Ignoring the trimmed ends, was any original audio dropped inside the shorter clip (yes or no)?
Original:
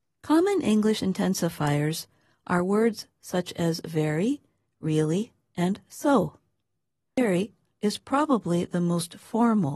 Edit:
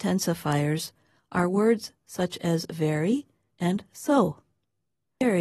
yes